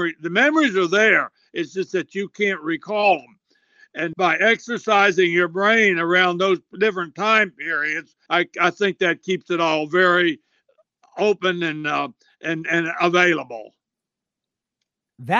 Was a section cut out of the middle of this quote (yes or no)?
yes